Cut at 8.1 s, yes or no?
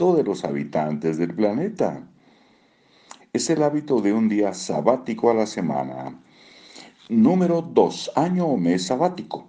no